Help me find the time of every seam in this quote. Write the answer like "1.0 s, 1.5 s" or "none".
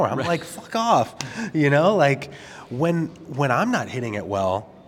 none